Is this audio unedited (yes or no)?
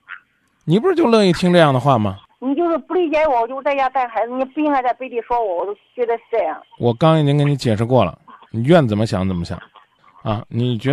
no